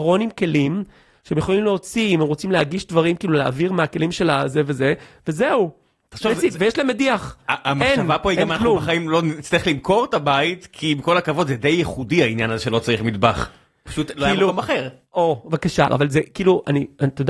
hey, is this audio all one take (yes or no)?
no